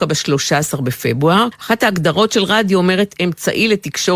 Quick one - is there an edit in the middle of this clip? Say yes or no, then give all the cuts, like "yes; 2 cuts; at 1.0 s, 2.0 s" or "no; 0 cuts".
yes; 1 cut; at 1.5 s